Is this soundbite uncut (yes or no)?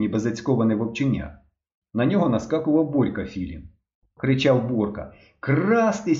no